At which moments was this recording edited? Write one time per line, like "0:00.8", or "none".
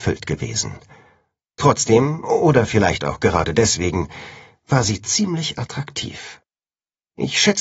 none